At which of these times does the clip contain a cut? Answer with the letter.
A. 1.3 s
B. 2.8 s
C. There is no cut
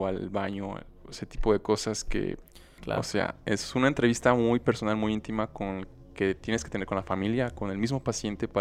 B